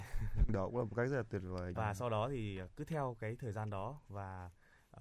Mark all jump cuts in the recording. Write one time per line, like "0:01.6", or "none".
0:01.8